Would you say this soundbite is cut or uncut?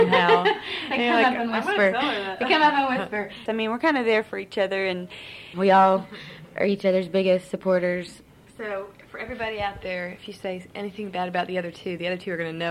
cut